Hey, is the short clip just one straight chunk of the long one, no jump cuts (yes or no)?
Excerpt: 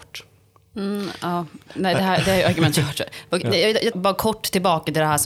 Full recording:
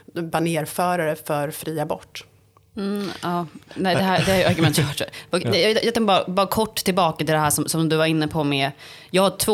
no